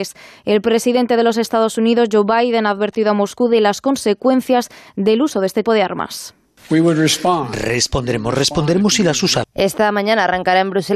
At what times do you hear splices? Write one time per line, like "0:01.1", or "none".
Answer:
0:05.6
0:09.4